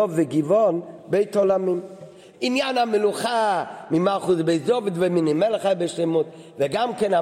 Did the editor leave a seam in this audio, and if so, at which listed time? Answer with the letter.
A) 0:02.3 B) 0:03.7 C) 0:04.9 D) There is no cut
A